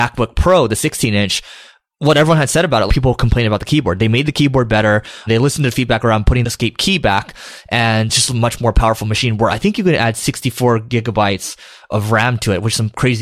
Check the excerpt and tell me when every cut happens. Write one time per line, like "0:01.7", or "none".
0:02.9